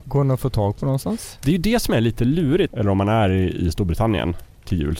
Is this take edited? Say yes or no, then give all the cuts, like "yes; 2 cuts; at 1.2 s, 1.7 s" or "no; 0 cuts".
yes; 1 cut; at 2.7 s